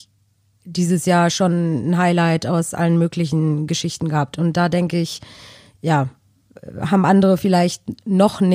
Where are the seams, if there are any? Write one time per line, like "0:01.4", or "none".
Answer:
none